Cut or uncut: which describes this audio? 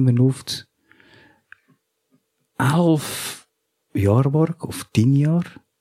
uncut